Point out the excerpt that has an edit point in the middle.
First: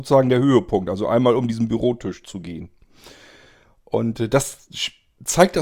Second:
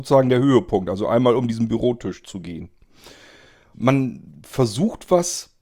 second; 1 cut; at 3.7 s

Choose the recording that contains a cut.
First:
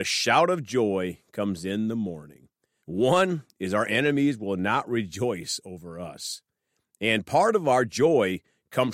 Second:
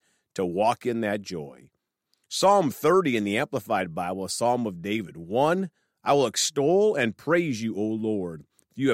first; 1 cut; at 2.8 s

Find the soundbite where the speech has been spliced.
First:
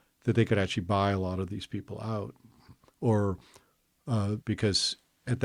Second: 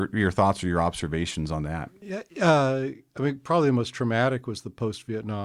first; 2 cuts; at 2.9 s, 4.4 s

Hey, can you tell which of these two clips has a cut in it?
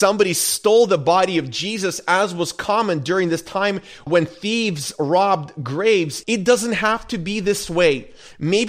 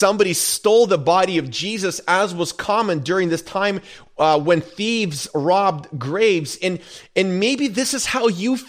first; 2 cuts; at 4.1 s, 6.2 s

